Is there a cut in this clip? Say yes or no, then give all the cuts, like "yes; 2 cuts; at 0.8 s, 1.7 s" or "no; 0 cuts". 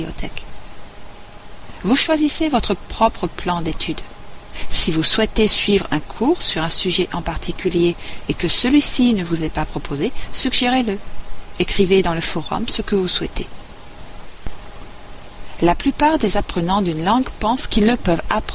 no; 0 cuts